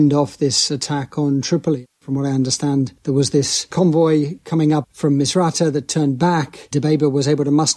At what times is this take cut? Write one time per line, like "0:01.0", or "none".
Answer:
none